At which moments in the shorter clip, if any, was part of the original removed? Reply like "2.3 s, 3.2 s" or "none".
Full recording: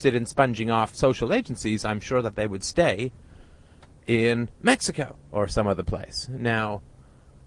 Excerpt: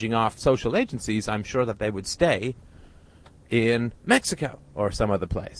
none